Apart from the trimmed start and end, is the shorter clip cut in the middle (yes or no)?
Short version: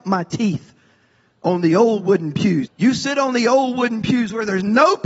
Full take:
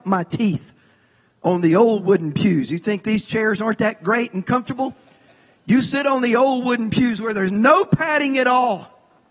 yes